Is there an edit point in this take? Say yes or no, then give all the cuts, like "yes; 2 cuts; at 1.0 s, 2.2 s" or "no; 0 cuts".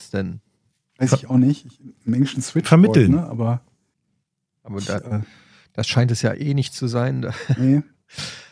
no; 0 cuts